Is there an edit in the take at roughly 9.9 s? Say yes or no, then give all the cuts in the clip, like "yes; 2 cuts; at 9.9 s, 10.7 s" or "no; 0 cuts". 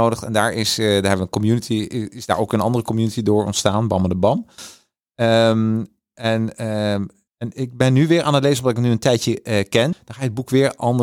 yes; 2 cuts; at 7.3 s, 9.9 s